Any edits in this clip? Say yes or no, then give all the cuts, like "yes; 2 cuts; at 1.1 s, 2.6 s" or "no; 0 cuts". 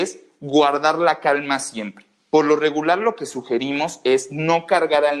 no; 0 cuts